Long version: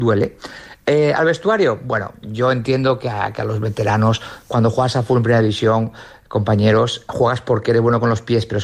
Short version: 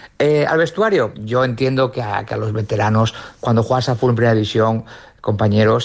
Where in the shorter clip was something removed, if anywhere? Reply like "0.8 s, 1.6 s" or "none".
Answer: 1.1 s